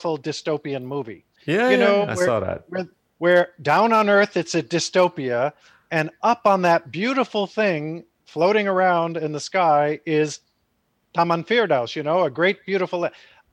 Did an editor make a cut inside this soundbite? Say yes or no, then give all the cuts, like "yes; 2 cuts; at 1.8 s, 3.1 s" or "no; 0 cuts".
yes; 1 cut; at 1.4 s